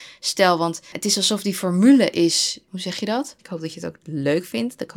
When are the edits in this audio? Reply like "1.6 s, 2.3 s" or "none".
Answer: 3.4 s